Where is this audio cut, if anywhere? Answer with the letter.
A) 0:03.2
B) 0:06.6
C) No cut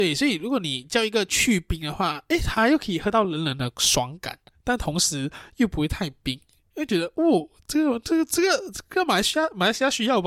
C